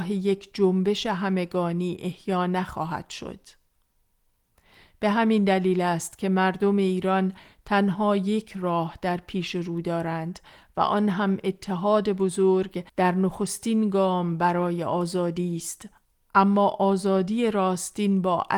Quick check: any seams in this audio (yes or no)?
yes